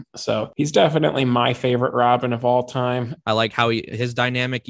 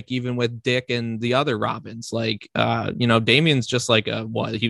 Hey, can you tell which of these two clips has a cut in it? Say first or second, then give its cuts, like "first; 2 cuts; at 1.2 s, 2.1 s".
first; 1 cut; at 3.2 s